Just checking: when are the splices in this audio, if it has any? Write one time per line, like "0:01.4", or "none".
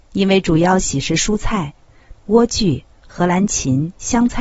0:02.1